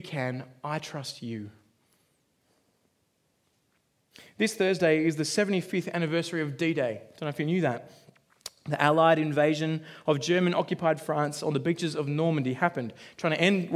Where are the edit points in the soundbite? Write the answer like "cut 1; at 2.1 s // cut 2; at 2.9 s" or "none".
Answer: none

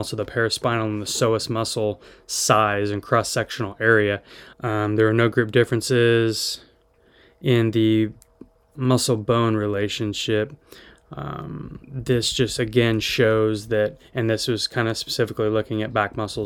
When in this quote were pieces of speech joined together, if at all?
cut 1; at 4.5 s // cut 2; at 11.8 s

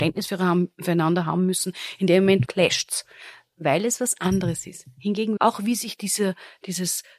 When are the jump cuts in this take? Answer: cut 1; at 2.5 s // cut 2; at 5.4 s

